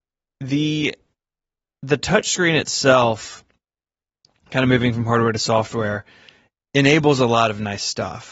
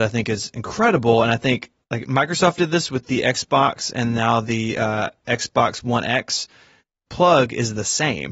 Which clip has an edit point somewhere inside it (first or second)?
second